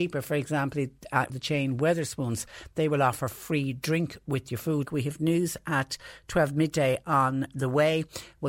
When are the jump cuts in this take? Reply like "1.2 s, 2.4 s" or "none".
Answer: 1.3 s, 4.8 s